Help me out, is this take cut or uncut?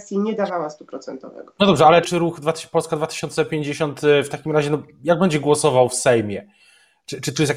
cut